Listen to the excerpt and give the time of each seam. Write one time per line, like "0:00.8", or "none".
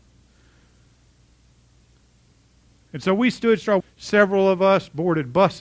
0:03.8